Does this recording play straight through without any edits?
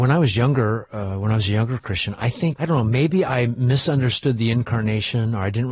no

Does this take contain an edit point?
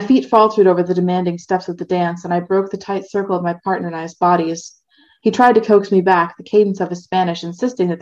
no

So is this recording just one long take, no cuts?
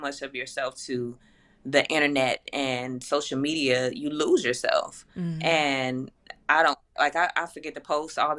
no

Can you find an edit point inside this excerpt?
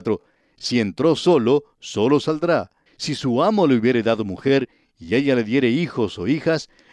yes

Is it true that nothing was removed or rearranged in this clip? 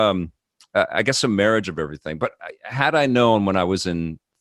yes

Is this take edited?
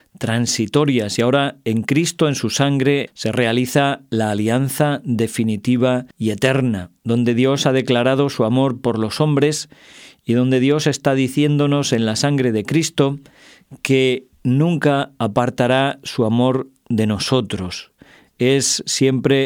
yes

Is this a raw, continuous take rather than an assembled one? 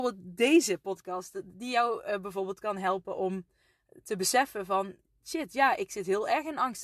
yes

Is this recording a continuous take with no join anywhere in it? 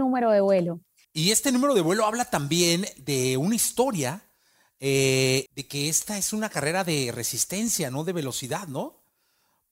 no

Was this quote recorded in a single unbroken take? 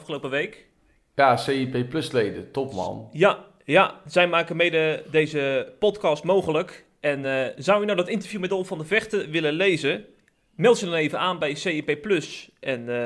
yes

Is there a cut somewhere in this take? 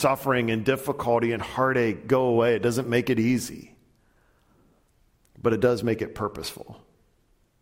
no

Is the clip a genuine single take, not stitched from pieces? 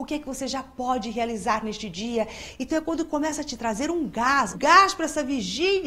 no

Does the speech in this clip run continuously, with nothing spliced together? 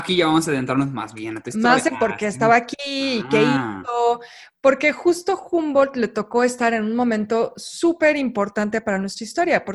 yes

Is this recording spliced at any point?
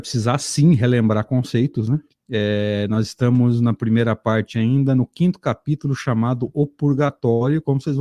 yes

